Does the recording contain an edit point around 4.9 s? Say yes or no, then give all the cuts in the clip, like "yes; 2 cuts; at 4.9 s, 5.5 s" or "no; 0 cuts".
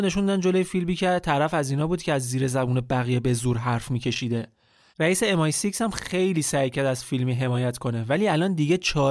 yes; 1 cut; at 4.9 s